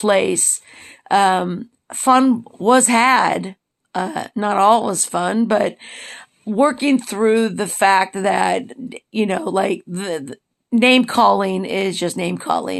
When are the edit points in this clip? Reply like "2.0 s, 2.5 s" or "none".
none